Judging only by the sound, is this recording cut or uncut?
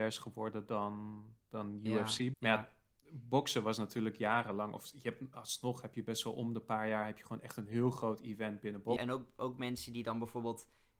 cut